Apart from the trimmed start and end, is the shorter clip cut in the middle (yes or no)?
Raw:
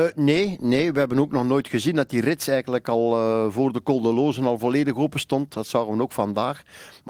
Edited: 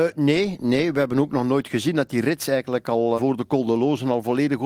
yes